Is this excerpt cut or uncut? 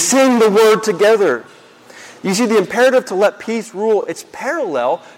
uncut